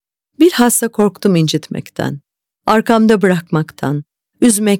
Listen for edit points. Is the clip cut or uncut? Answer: uncut